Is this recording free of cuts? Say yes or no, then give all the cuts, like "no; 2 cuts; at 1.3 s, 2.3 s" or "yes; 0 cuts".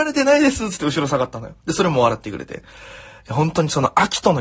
yes; 0 cuts